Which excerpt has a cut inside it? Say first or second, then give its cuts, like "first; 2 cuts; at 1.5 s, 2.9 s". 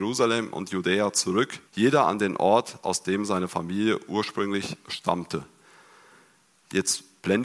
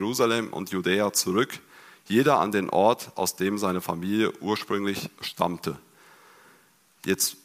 first; 1 cut; at 1.7 s